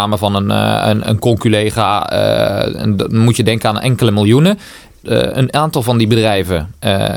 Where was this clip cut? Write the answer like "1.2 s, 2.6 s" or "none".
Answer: 4.9 s

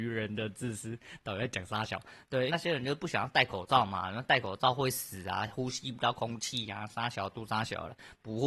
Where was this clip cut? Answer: 2.5 s

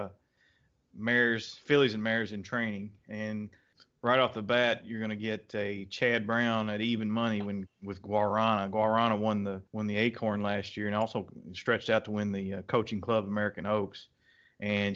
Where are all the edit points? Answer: 9.7 s

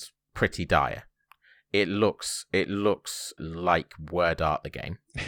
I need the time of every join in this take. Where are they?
3.4 s

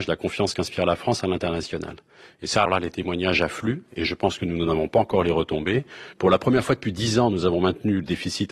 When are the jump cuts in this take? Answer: 2.7 s, 6.1 s

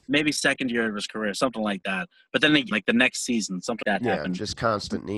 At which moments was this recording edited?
2.7 s, 3.8 s

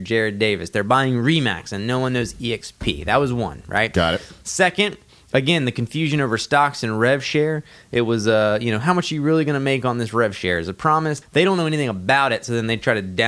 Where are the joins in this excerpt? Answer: 11.2 s

